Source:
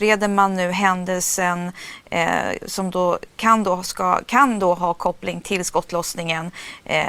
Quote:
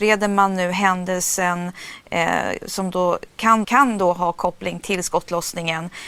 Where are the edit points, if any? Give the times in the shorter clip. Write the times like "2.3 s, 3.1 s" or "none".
3.6 s